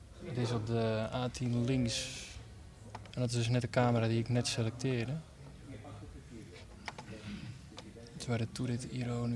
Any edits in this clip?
yes; 1 cut; at 3.1 s

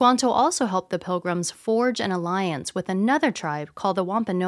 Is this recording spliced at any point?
no; 0 cuts

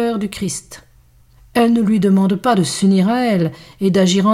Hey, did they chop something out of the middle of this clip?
yes; 1 cut; at 1.4 s

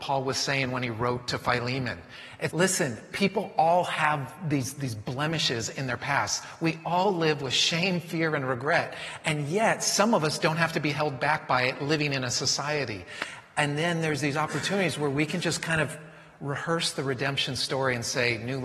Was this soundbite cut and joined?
yes; 1 cut; at 2.5 s

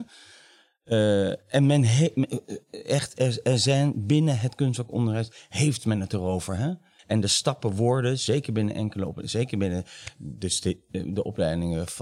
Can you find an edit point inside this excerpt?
yes; 1 cut; at 7.0 s

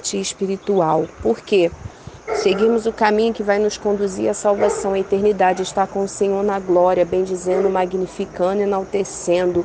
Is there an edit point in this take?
yes; 1 cut; at 2.3 s

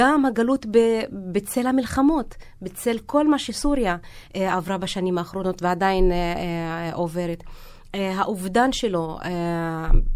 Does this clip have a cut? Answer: no; 0 cuts

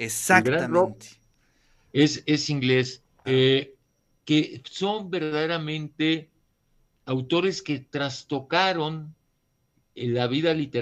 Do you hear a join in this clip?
yes; 1 cut; at 3.2 s

